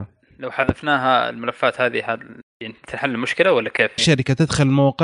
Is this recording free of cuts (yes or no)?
no